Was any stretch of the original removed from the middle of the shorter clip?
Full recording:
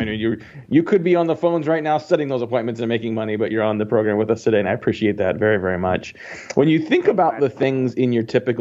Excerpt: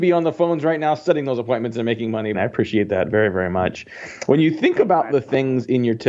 yes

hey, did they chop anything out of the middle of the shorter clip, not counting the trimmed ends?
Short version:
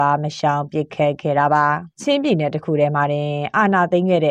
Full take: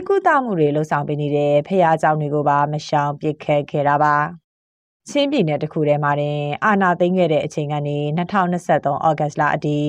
yes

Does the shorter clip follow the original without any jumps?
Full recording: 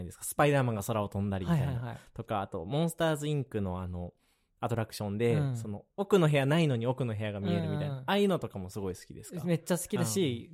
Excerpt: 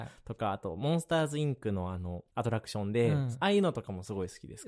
no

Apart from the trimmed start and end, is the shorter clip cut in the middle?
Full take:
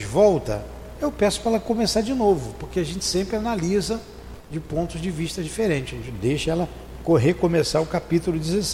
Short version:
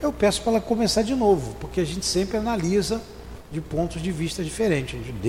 no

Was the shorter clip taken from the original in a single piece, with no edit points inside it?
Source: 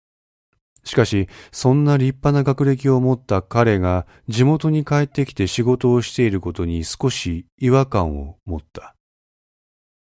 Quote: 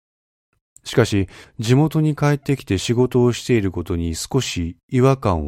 no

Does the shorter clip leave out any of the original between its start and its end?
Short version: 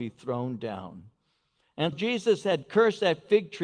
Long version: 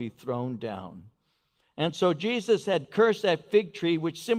yes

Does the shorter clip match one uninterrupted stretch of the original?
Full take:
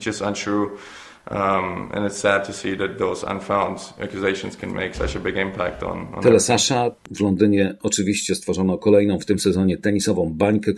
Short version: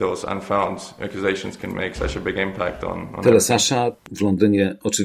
yes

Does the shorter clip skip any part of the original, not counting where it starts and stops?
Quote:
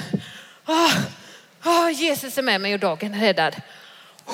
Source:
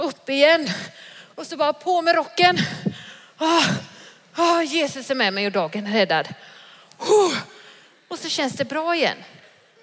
no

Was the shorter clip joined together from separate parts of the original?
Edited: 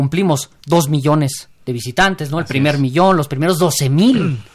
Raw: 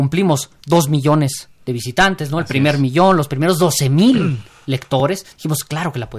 no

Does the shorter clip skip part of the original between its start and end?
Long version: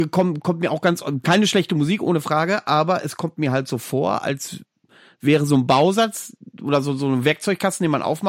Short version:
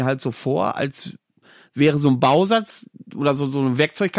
no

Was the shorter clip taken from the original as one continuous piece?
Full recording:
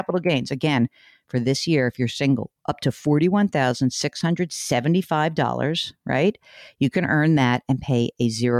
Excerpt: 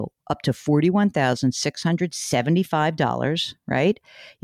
yes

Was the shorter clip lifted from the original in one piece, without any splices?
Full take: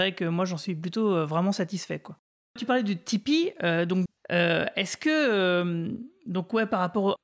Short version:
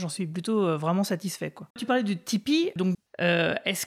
no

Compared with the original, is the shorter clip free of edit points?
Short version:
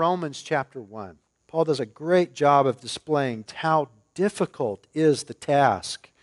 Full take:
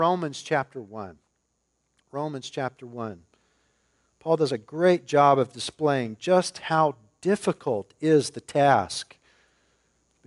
no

